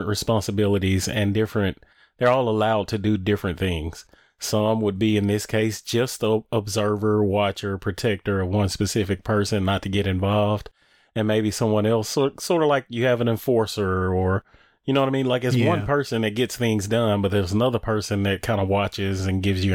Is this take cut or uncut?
uncut